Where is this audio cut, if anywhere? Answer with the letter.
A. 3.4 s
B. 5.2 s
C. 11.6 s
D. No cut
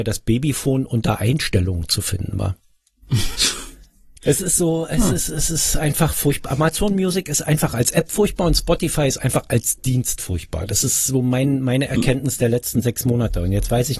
A